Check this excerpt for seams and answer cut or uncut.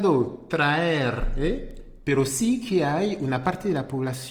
cut